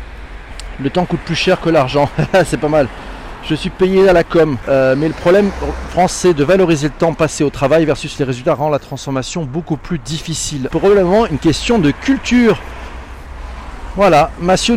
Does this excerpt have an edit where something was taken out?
yes; 2 cuts; at 4.6 s, 10.7 s

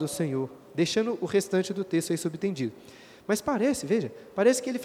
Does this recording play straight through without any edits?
yes; 0 cuts

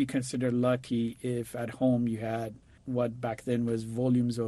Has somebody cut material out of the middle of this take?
yes; 1 cut; at 2.8 s

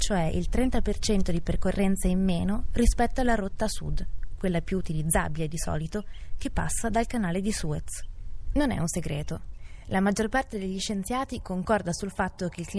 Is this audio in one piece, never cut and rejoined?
yes; 0 cuts

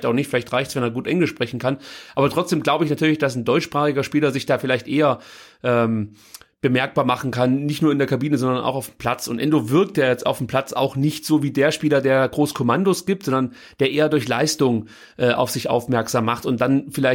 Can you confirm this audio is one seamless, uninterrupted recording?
yes; 0 cuts

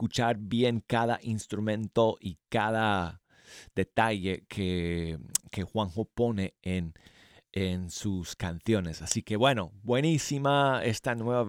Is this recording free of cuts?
yes; 0 cuts

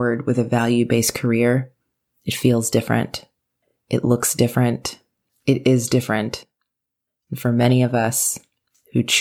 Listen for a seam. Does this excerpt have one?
no; 0 cuts

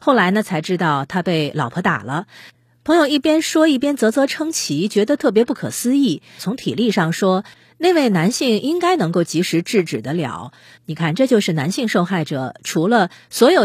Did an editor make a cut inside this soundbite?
yes; 2 cuts; at 6.4 s, 10.8 s

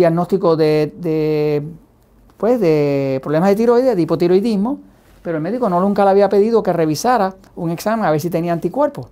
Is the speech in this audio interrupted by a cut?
no; 0 cuts

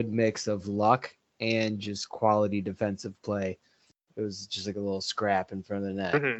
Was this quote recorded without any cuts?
no; 1 cut; at 4.1 s

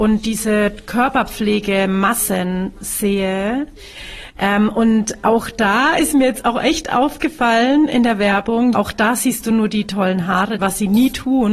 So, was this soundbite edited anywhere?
yes; 2 cuts; at 8.7 s, 10.6 s

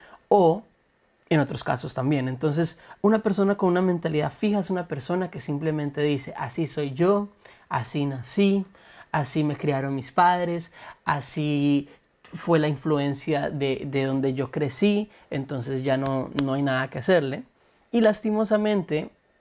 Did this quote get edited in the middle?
no; 0 cuts

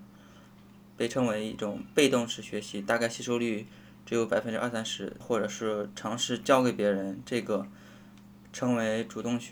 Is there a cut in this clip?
yes; 1 cut; at 5.2 s

